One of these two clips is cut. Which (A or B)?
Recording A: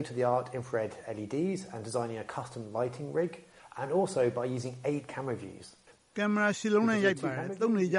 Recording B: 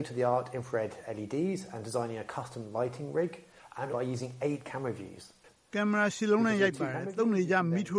B